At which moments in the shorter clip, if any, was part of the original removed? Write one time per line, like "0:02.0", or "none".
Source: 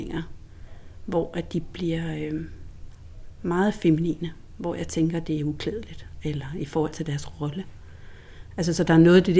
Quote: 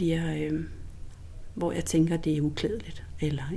0:01.5